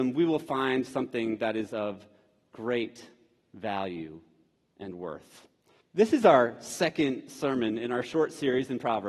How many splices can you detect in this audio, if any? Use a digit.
1